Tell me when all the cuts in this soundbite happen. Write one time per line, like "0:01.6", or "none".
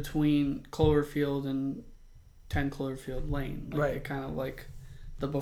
none

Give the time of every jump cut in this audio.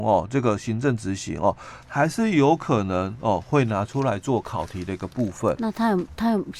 0:01.8

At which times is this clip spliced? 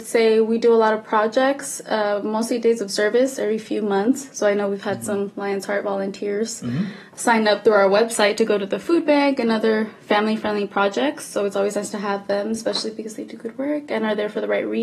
none

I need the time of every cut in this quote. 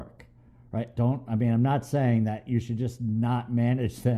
0:00.9

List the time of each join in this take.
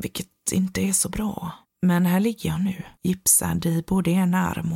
0:01.6
0:02.9

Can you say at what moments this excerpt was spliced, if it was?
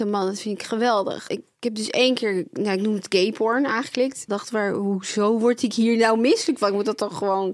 0:01.3
0:04.3

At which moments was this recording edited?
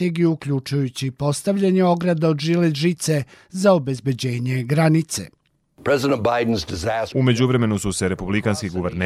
0:07.1

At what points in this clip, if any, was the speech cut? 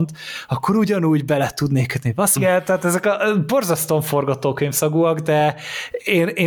0:02.4

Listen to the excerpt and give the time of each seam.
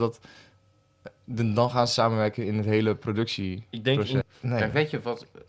0:04.2

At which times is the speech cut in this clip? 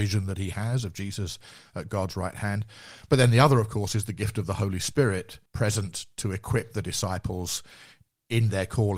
0:05.5

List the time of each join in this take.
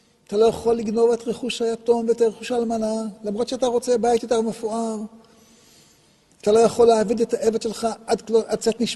none

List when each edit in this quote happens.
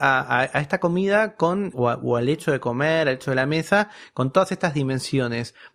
0:01.7

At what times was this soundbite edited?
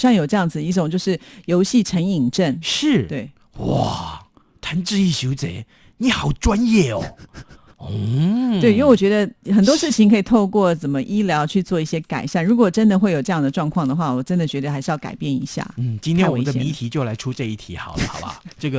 none

